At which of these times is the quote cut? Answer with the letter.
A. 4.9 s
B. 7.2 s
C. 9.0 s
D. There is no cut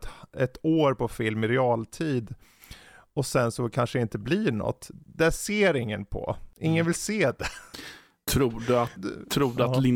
C